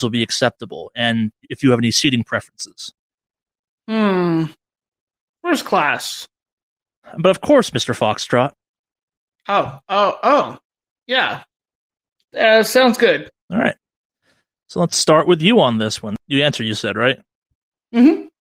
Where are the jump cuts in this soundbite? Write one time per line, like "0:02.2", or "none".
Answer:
0:13.4
0:16.2